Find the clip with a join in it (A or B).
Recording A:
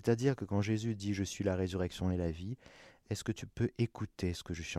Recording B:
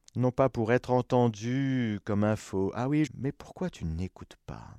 B